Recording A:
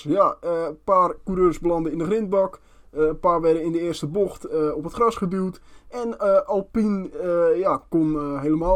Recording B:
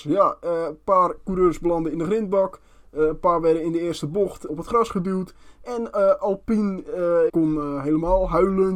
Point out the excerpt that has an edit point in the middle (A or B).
B